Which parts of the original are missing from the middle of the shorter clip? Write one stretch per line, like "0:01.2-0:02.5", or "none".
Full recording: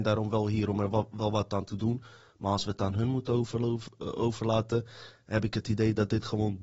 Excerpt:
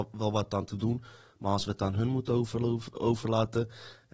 0:03.9-0:04.1